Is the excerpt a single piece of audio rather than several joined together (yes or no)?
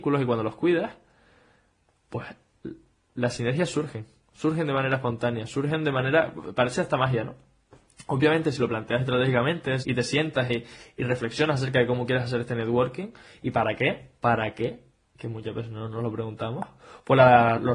no